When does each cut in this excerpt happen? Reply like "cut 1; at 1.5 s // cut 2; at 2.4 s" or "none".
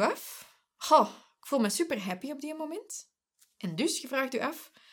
none